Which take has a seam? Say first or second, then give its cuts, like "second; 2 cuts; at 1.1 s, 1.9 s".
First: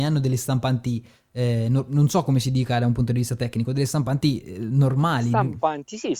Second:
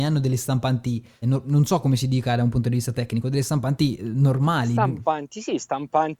second; 2 cuts; at 1.2 s, 4.0 s